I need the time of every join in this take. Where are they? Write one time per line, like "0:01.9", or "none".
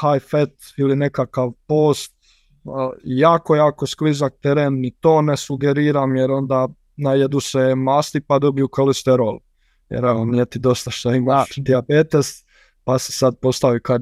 none